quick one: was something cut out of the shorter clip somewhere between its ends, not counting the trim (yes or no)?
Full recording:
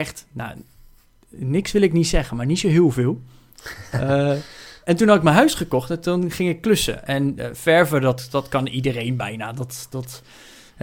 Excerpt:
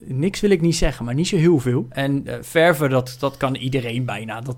yes